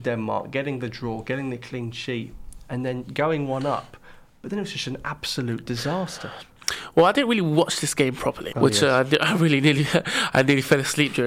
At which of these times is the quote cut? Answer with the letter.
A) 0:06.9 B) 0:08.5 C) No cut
B